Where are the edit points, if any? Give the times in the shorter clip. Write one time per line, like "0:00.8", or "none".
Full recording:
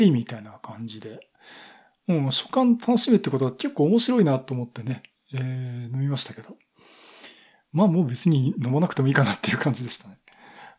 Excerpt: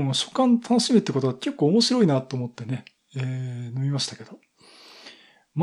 none